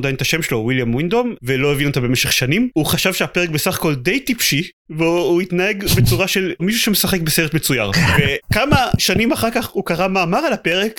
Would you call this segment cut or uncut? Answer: cut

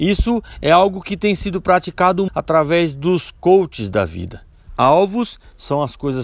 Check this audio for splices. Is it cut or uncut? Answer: cut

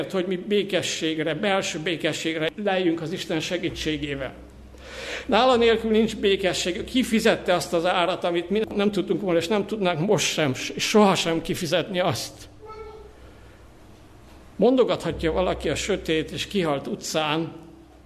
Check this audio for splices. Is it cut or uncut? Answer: uncut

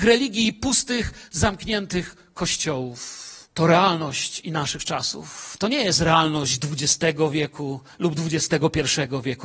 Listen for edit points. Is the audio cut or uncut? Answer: cut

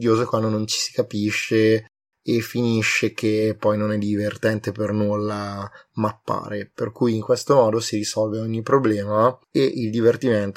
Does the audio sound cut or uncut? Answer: cut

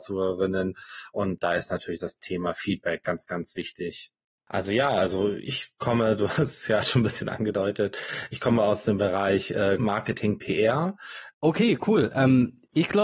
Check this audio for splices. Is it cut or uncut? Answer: cut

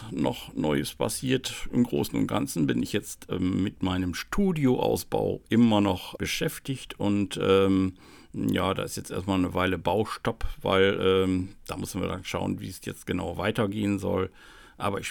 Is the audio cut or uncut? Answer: cut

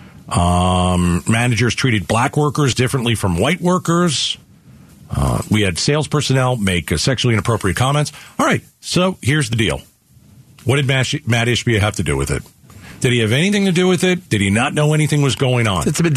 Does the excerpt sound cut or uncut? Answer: cut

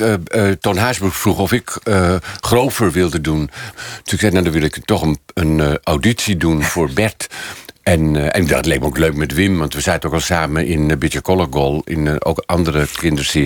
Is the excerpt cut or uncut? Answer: cut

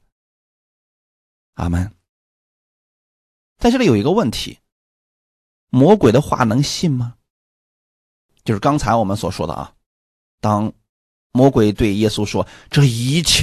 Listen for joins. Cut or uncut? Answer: uncut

